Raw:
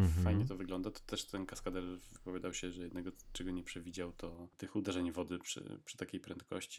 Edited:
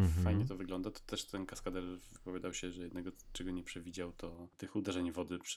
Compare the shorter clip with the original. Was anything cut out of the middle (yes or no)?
no